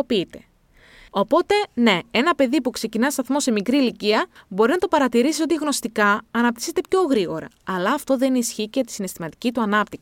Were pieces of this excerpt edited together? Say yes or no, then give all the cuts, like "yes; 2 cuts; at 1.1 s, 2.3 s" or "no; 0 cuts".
yes; 2 cuts; at 1.1 s, 4.4 s